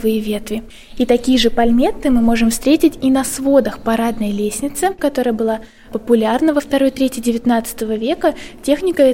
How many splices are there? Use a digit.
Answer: 1